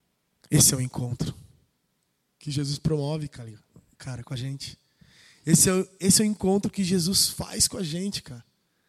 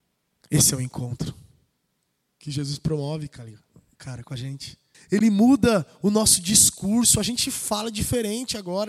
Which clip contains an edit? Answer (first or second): second